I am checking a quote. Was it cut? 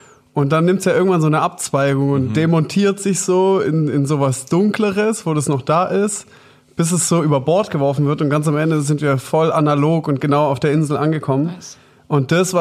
no; 0 cuts

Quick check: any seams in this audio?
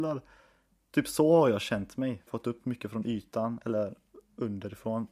yes; 1 cut; at 2.3 s

